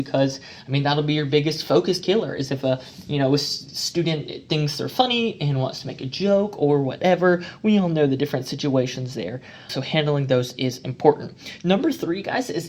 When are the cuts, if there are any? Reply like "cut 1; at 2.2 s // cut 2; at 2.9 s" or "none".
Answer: cut 1; at 9.7 s